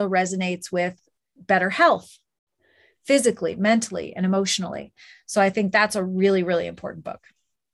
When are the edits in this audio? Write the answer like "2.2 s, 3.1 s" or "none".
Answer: none